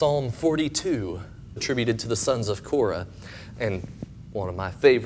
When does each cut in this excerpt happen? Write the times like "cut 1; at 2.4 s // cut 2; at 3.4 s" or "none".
cut 1; at 1.6 s // cut 2; at 3.6 s